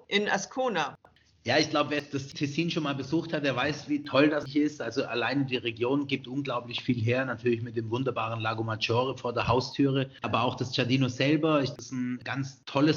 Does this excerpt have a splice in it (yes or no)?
yes